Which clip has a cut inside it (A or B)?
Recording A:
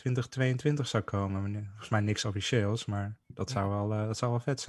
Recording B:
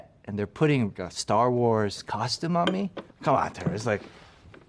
B